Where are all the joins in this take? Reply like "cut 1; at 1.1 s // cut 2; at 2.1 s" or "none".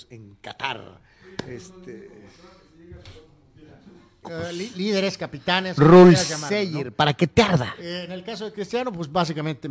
cut 1; at 4.2 s

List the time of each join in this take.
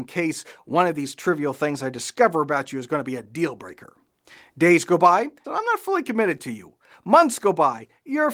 cut 1; at 5.4 s

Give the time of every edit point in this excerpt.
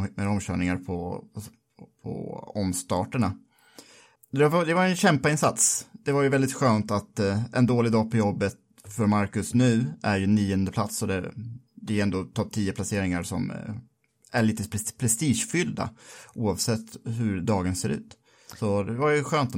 none

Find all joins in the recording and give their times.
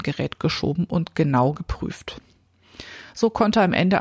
none

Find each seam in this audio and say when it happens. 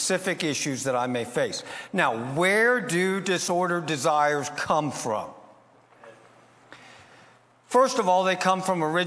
none

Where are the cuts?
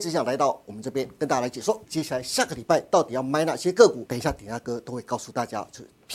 cut 1; at 1.8 s // cut 2; at 4.1 s

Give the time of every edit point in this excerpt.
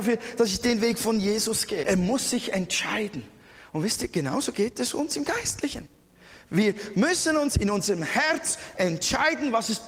cut 1; at 1.8 s

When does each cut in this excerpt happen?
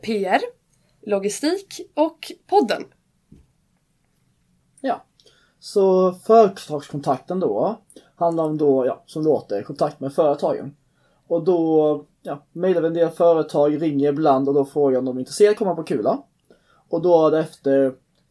none

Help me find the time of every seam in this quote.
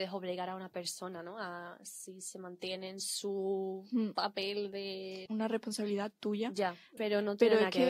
cut 1; at 5.3 s // cut 2; at 7.0 s

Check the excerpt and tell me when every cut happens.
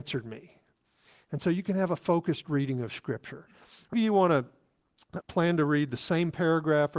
cut 1; at 3.9 s // cut 2; at 5.2 s

